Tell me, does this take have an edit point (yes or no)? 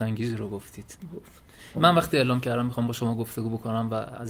yes